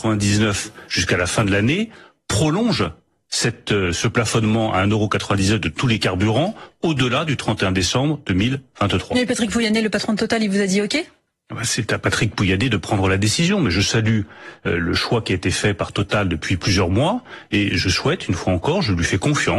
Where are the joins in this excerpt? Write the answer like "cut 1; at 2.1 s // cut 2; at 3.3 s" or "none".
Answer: none